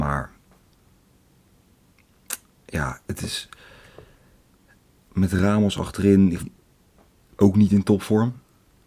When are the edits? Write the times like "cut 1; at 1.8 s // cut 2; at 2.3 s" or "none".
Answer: cut 1; at 6.4 s